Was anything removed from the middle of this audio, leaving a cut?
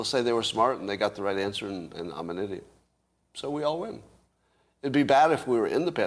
no; 0 cuts

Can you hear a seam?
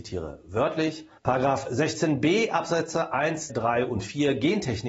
yes; 2 cuts; at 1.2 s, 3.5 s

